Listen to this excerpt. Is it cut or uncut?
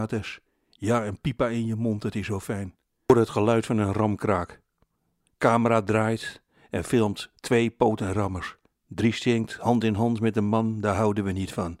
uncut